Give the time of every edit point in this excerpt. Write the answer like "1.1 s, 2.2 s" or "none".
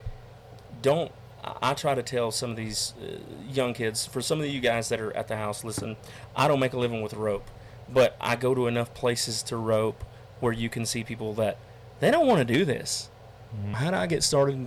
13.7 s